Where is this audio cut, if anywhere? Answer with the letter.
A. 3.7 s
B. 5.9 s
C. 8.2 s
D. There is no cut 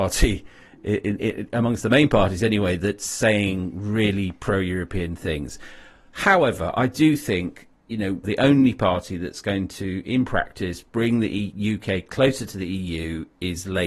C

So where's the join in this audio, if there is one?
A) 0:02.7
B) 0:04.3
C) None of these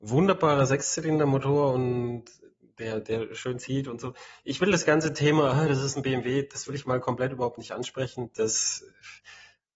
C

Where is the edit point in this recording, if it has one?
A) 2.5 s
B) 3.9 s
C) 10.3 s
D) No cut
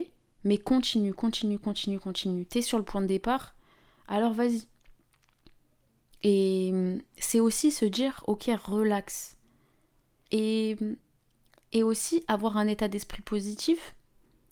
C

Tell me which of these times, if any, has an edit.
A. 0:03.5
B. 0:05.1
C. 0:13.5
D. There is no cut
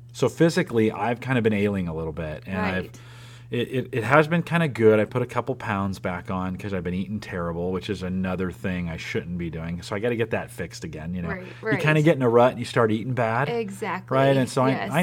B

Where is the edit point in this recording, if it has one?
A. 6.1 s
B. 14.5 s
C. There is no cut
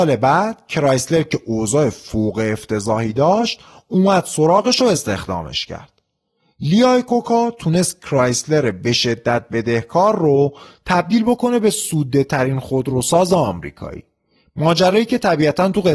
C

